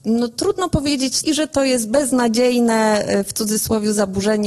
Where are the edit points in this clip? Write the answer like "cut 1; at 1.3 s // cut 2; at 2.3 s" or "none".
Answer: cut 1; at 1.2 s